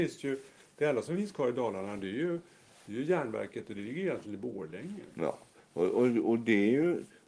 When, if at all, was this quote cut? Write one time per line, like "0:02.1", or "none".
none